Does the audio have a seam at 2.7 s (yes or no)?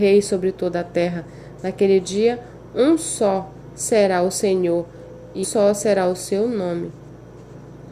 no